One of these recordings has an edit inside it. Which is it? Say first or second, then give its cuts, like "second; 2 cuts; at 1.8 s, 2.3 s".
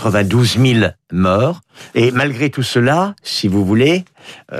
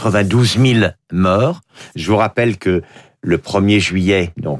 first; 1 cut; at 1.9 s